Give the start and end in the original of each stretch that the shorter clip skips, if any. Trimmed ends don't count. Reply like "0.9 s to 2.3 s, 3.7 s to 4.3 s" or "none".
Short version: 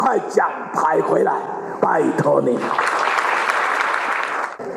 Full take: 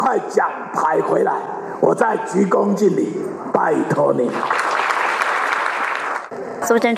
1.8 s to 3.5 s